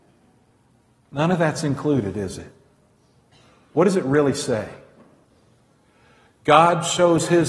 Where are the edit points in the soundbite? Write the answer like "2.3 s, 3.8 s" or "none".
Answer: none